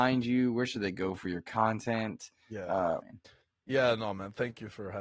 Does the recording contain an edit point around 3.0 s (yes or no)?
yes